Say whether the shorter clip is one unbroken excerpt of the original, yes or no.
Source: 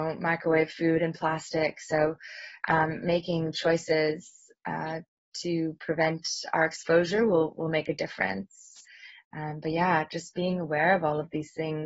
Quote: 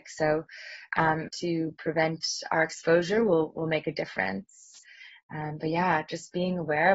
no